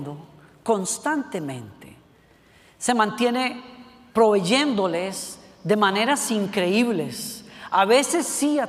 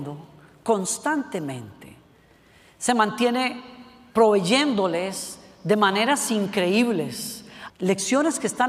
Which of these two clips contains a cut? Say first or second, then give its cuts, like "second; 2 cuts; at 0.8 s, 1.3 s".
second; 1 cut; at 7.7 s